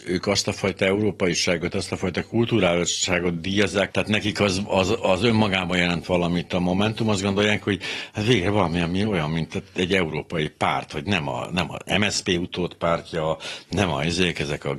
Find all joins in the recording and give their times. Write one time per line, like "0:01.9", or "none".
0:01.7
0:03.9